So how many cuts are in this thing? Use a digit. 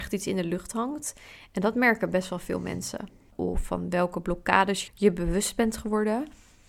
2